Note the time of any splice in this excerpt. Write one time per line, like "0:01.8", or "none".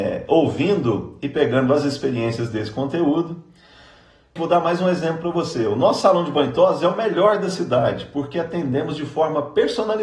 0:04.4